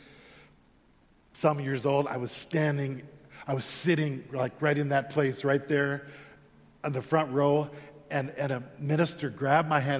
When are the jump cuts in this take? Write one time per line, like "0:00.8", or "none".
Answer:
none